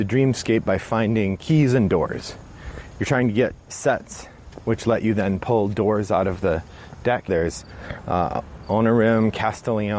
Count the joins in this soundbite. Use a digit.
2